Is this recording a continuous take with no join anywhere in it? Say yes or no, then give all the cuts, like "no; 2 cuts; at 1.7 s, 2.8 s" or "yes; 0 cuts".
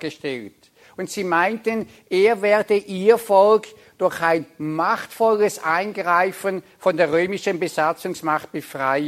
yes; 0 cuts